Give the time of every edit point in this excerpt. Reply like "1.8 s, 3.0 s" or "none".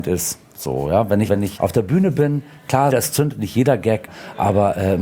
1.3 s, 2.9 s